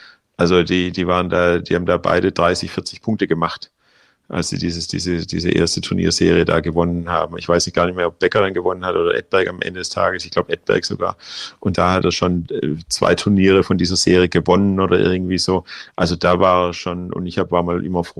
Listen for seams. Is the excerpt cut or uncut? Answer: uncut